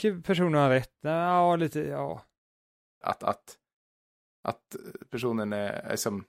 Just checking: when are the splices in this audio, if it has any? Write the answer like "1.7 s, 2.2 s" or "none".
3.0 s